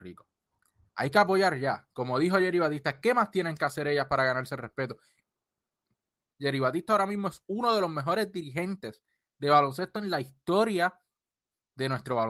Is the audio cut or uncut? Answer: cut